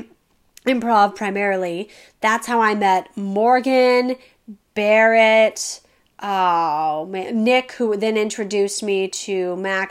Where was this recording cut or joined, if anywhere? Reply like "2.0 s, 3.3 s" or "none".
none